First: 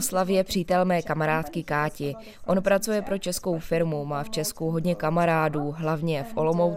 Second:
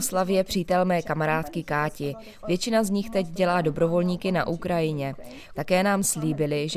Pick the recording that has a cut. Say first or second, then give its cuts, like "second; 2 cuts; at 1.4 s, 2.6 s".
second; 2 cuts; at 2.4 s, 5.6 s